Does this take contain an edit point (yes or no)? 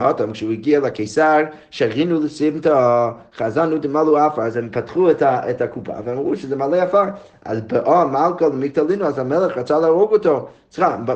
no